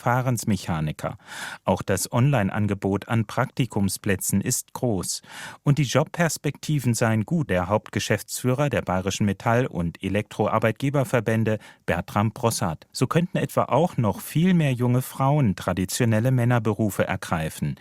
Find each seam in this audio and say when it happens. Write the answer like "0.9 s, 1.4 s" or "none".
7.5 s, 12.9 s